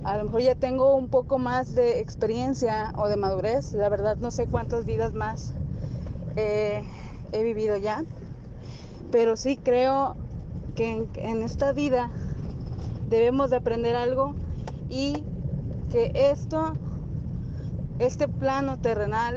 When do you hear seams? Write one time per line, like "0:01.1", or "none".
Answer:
none